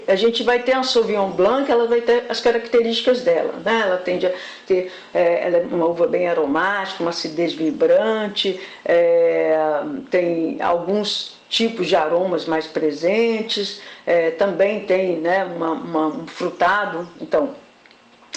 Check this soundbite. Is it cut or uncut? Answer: cut